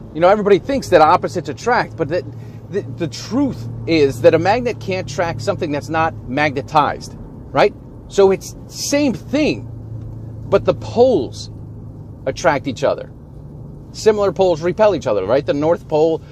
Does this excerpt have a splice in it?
no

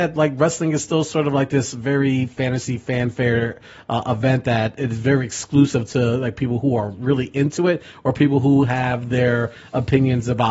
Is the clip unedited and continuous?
yes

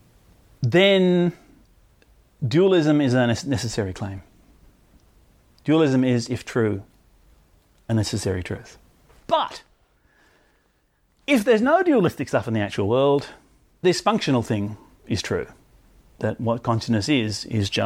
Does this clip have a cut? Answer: yes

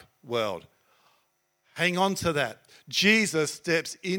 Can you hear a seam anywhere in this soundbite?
no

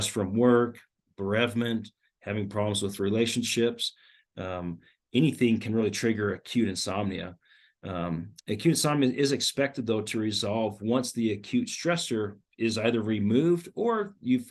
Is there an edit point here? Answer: no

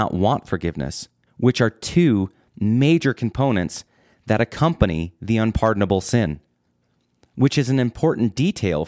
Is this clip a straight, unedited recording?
no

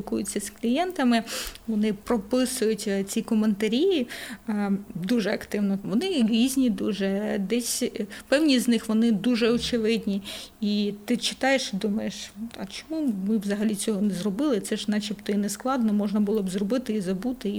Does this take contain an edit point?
yes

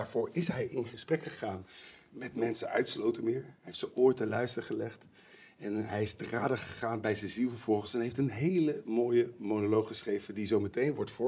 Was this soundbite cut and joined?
no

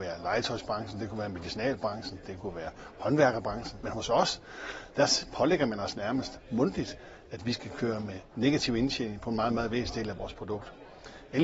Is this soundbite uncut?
yes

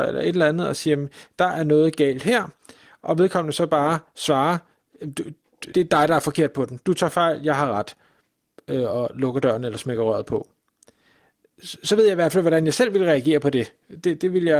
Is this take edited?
yes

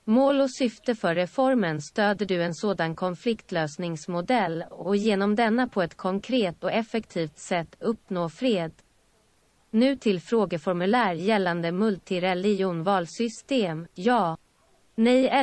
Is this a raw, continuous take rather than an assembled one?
yes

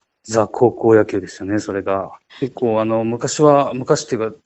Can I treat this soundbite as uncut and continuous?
no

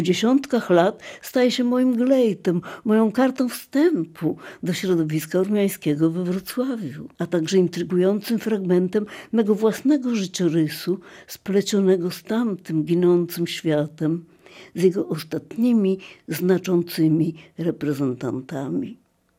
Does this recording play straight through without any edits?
no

